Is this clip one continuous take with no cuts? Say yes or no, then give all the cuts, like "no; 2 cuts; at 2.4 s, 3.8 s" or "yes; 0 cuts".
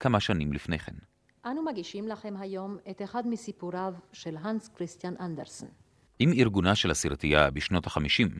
no; 1 cut; at 6.1 s